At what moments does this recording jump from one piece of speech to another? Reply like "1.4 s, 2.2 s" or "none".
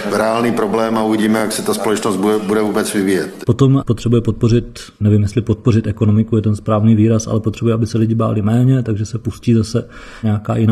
none